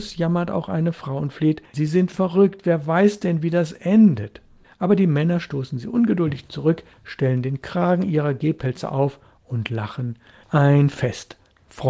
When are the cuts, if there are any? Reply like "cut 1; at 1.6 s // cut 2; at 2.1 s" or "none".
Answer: cut 1; at 1.7 s // cut 2; at 10.4 s